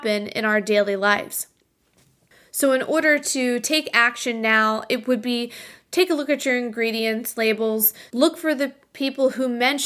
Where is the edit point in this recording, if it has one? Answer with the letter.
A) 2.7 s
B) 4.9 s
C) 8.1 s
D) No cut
C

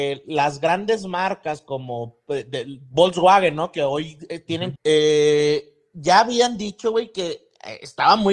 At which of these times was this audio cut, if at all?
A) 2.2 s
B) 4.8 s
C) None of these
B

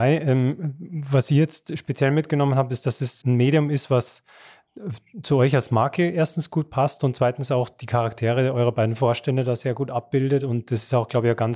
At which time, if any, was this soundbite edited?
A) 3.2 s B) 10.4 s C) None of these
A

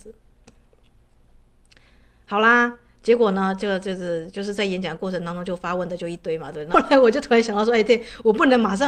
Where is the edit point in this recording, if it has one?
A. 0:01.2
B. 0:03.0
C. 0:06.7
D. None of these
C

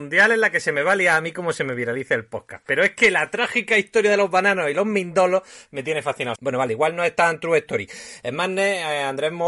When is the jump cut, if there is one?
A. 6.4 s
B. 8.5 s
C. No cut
A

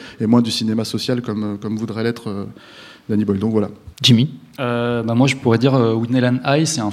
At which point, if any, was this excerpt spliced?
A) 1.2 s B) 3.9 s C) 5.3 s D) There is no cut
B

